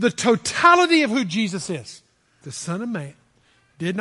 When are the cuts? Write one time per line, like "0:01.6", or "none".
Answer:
0:02.4